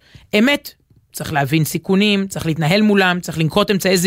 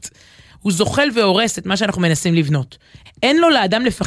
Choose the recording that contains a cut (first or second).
second